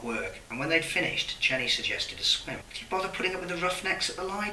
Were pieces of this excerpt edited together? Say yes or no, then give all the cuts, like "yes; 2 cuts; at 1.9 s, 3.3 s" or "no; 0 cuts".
yes; 1 cut; at 2.6 s